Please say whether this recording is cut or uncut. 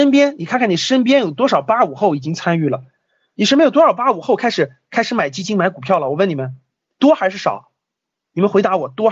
uncut